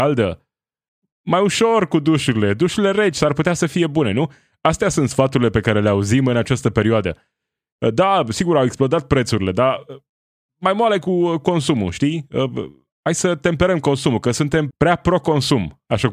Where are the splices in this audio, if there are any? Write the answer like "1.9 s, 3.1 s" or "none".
14.7 s

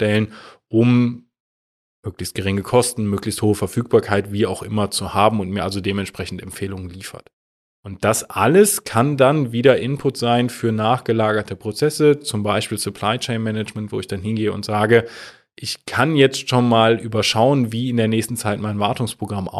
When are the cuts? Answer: none

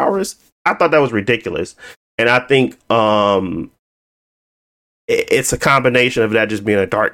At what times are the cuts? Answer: none

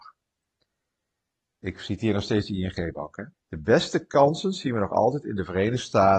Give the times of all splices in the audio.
3.3 s

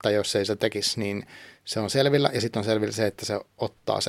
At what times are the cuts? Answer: none

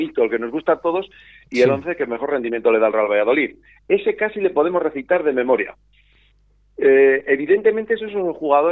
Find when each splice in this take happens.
none

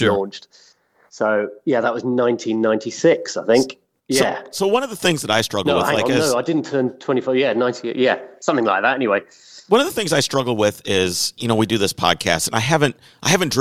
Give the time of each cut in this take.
none

